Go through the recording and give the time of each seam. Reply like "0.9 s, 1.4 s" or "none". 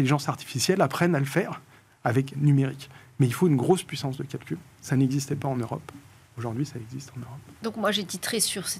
2.3 s